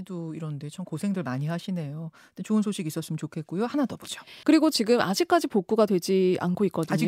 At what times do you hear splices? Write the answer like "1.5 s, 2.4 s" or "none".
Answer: 4.4 s